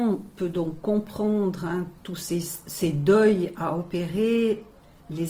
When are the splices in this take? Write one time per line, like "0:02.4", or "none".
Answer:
none